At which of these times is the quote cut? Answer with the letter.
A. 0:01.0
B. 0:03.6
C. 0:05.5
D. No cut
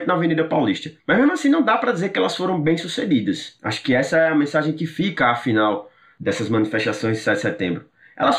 A